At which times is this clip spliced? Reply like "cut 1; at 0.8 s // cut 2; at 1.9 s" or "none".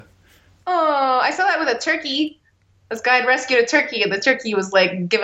none